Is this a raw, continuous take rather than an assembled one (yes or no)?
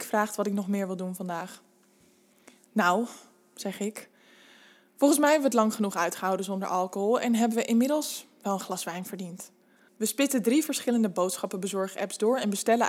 no